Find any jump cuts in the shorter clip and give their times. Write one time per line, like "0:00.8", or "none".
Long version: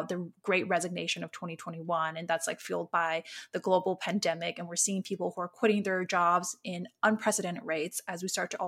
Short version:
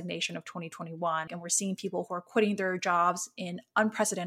0:01.3